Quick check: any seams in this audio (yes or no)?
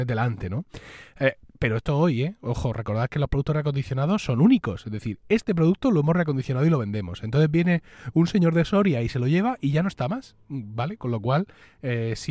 no